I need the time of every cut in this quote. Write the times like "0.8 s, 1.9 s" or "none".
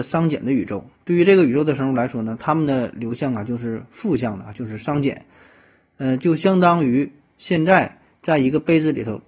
none